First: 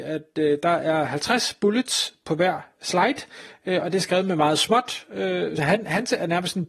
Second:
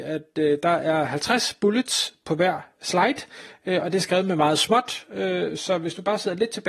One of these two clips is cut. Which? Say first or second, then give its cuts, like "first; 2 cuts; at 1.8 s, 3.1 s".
first; 1 cut; at 5.6 s